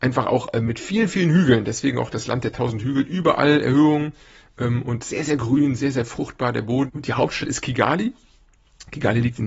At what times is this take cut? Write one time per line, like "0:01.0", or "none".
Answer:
0:06.9